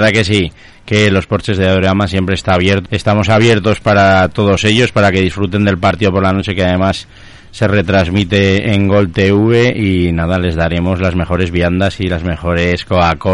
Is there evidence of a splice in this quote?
yes; 1 cut; at 2.9 s

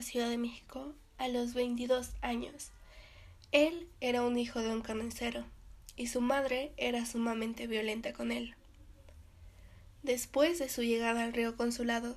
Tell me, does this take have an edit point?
no; 0 cuts

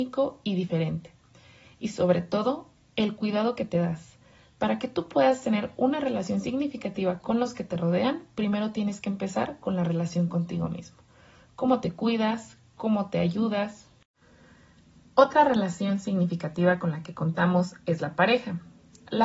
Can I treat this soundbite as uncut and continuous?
yes; 0 cuts

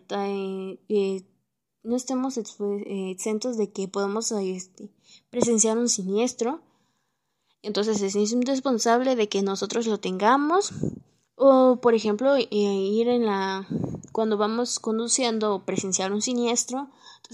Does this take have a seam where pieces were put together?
no; 0 cuts

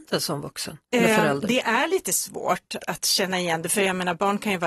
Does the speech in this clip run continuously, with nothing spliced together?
no; 1 cut; at 2.8 s

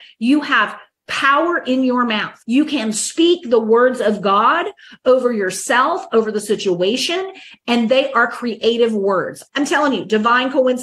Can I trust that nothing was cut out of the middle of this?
no; 2 cuts; at 2.4 s, 9.5 s

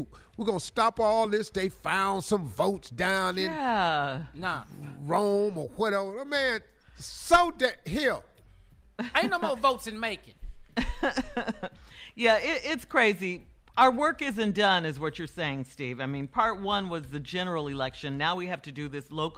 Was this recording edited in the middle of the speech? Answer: no; 0 cuts

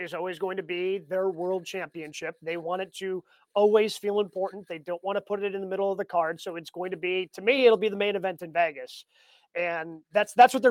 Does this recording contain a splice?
no; 0 cuts

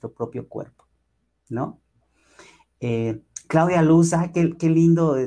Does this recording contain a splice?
no; 0 cuts

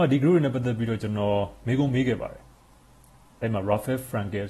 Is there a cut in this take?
no; 0 cuts

